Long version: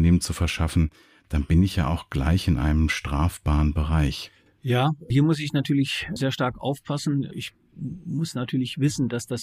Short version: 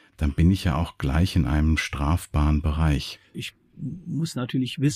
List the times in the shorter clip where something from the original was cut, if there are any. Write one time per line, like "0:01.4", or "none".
0:03.3